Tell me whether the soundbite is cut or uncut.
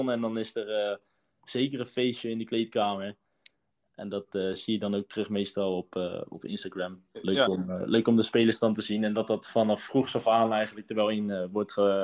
uncut